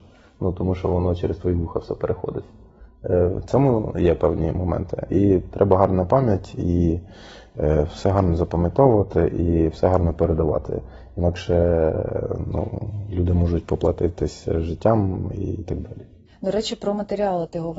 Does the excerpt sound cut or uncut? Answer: uncut